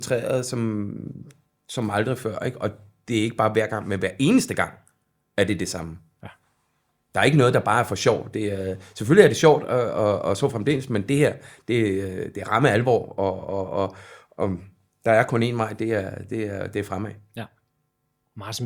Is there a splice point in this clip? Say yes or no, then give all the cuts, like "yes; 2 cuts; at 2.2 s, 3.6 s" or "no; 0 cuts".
no; 0 cuts